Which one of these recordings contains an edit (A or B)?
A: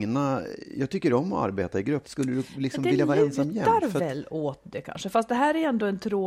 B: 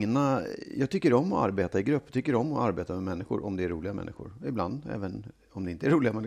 A